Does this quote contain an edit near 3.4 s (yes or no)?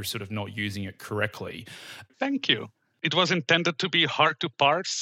no